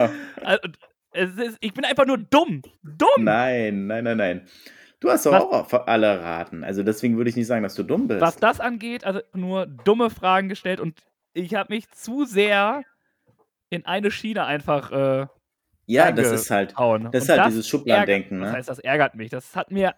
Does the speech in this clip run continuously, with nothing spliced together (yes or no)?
no